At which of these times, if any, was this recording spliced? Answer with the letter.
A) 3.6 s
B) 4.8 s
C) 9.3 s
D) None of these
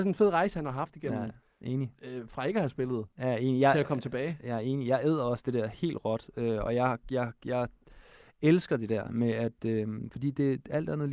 D